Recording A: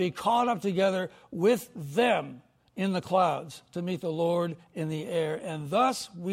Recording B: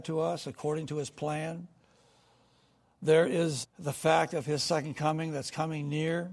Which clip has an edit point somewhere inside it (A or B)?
B